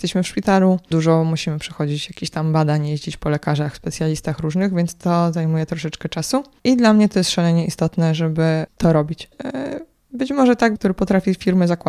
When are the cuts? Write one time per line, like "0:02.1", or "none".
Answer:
0:09.3
0:10.8